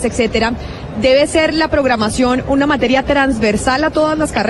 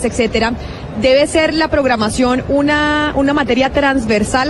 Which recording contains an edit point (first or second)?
first